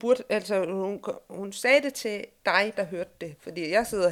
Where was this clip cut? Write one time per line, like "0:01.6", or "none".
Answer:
0:02.7